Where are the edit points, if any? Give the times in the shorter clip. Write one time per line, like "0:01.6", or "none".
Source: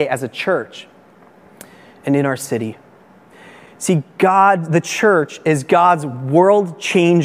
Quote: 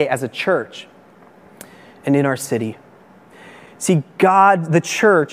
none